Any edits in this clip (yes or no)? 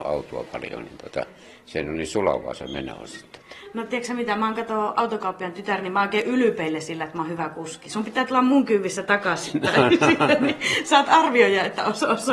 no